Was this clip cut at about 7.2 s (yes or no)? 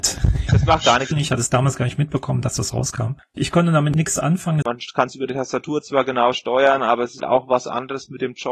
yes